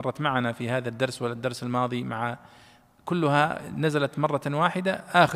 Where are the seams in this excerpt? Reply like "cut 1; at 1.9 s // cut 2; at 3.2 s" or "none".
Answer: none